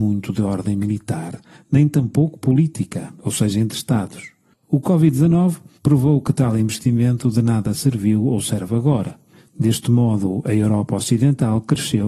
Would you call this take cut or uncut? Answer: cut